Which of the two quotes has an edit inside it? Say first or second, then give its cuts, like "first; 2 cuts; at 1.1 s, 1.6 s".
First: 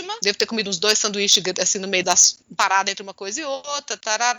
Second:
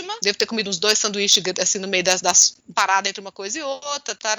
first; 1 cut; at 2.0 s